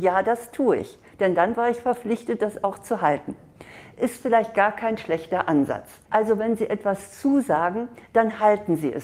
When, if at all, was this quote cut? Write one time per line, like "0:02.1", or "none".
0:06.1

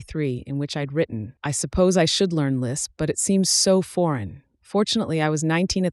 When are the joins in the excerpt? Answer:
0:01.4

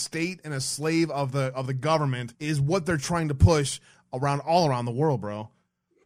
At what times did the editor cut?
0:02.3

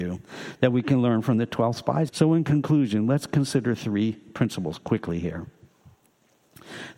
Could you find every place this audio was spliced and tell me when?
0:02.1

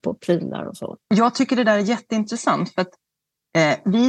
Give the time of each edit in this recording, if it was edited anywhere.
none

